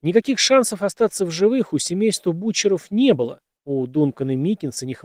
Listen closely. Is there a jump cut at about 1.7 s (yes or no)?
no